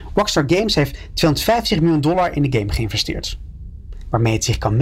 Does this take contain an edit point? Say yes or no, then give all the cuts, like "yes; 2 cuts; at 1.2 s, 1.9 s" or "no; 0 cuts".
no; 0 cuts